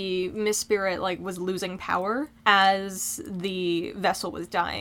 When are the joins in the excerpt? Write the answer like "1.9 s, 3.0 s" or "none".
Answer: 2.4 s